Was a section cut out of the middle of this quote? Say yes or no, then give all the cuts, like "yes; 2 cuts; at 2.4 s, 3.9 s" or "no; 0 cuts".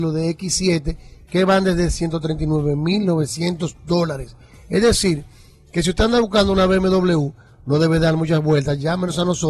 no; 0 cuts